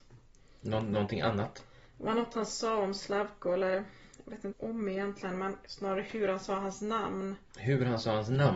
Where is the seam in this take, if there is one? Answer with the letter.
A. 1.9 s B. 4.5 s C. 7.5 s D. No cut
B